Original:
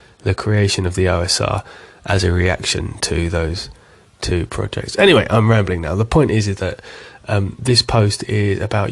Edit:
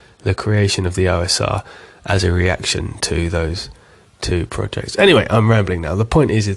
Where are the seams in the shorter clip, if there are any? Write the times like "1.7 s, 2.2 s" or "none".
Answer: none